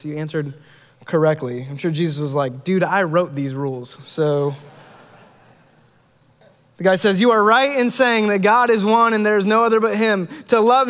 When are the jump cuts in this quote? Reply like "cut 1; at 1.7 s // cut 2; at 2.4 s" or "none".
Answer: none

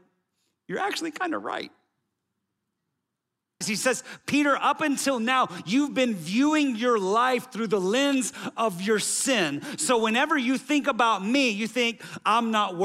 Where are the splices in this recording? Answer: cut 1; at 3.6 s

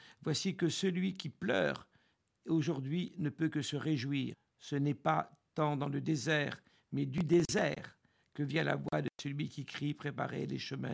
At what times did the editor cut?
none

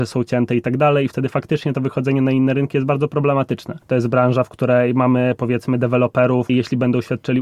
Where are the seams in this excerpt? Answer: cut 1; at 3.8 s // cut 2; at 6.5 s

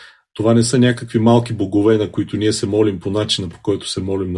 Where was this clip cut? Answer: none

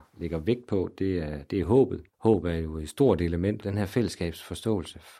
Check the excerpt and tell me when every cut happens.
cut 1; at 2.1 s // cut 2; at 3.6 s

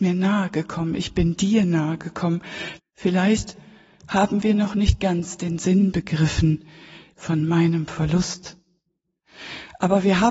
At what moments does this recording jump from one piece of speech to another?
cut 1; at 2.8 s // cut 2; at 7.1 s

